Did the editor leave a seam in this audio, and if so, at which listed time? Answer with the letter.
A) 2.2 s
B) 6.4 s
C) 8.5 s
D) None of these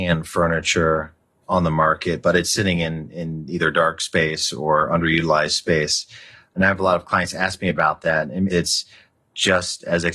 C